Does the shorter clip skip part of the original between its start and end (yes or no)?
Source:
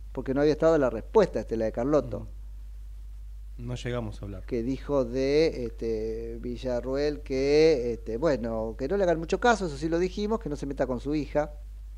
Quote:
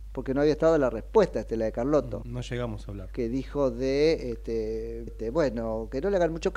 yes